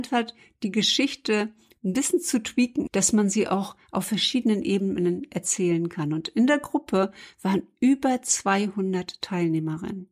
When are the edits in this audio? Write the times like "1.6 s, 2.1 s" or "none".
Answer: 2.9 s